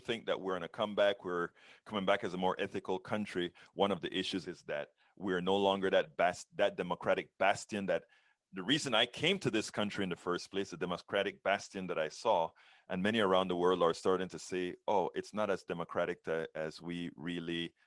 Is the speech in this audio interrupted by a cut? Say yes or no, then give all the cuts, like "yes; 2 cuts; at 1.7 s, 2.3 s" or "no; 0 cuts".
yes; 1 cut; at 4.4 s